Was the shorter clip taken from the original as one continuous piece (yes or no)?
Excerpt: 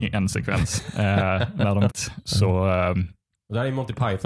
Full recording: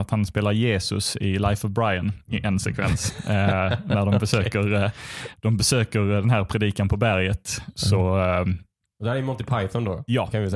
no